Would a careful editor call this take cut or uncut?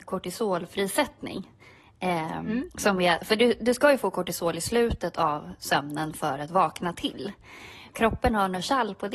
cut